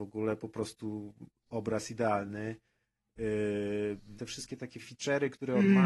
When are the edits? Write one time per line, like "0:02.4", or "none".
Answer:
0:04.2